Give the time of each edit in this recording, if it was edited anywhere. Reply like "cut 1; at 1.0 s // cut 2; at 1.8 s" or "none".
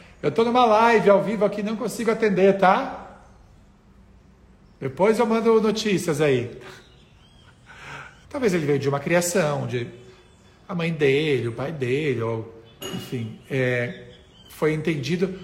cut 1; at 8.2 s